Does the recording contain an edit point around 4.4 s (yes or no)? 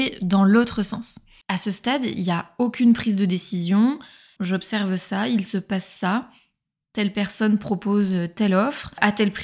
yes